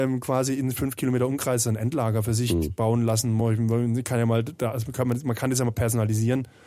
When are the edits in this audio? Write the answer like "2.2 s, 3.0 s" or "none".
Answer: none